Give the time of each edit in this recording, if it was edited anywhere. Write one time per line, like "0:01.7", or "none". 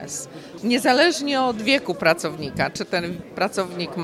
none